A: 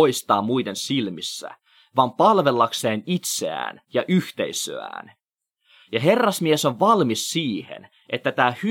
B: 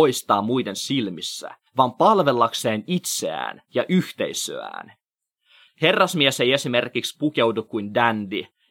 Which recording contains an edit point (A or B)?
B